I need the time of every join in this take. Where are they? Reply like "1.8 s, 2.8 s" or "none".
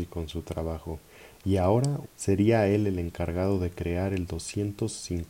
2.0 s